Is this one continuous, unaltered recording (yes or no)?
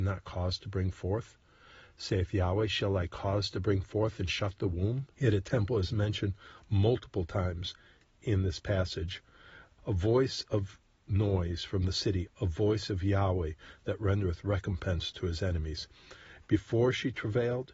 no